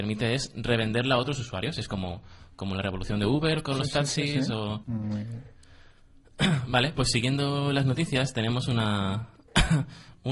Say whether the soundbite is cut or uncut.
cut